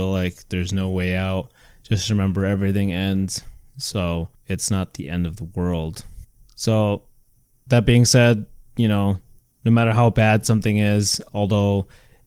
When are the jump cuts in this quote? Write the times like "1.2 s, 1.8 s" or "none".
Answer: none